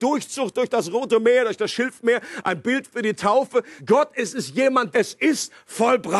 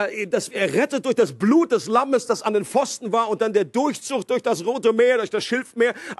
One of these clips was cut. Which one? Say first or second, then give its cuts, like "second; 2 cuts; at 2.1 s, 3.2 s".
first; 2 cuts; at 3.8 s, 4.9 s